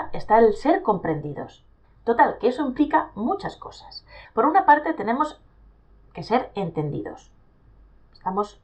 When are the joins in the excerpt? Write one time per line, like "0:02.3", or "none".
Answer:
0:01.8
0:04.2

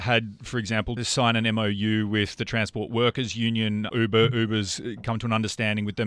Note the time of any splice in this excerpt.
0:01.0

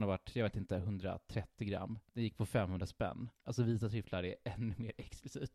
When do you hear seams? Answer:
0:02.1
0:03.4

